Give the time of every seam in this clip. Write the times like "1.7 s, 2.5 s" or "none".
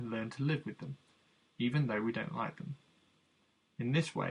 none